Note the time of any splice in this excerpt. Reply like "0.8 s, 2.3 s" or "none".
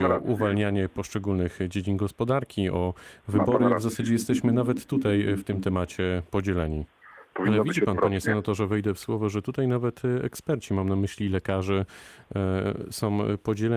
7.3 s